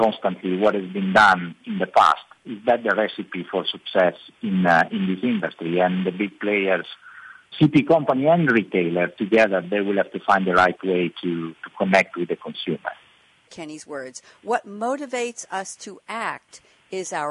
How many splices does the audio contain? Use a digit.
2